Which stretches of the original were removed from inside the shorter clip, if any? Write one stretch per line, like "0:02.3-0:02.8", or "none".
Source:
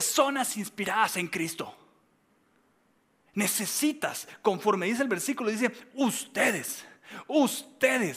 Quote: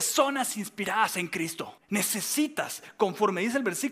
0:01.8-0:03.2